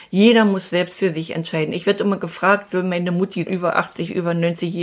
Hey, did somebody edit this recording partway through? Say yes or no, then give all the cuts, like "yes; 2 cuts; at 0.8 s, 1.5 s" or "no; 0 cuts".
yes; 1 cut; at 3.5 s